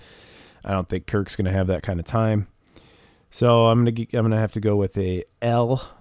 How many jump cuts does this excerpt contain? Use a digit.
0